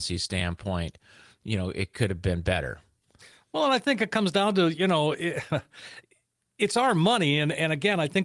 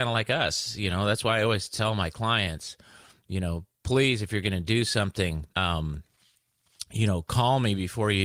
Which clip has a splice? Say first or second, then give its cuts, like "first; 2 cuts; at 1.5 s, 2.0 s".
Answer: second; 1 cut; at 5.5 s